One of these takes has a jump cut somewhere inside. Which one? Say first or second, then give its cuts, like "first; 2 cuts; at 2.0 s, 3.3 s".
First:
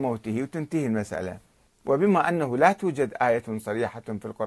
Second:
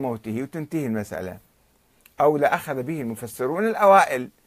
first; 1 cut; at 1.7 s